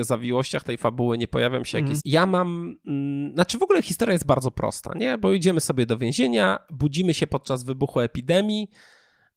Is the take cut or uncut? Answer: cut